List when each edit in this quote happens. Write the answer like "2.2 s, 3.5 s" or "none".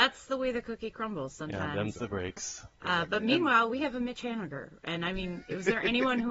none